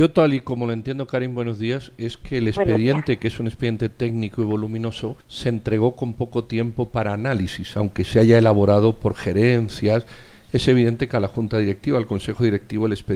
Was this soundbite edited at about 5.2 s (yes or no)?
yes